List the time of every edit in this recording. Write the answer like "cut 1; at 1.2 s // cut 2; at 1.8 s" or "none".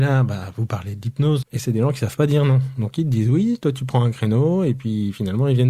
cut 1; at 1.4 s